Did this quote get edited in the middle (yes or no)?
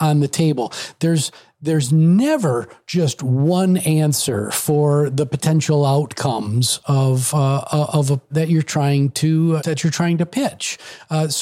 yes